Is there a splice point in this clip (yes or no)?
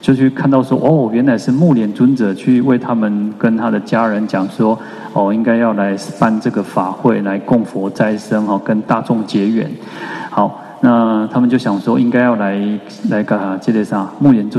no